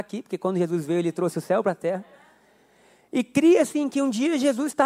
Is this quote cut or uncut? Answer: uncut